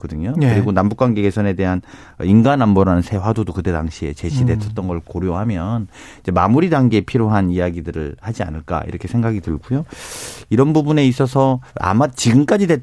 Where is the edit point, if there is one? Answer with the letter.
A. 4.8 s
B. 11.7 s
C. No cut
B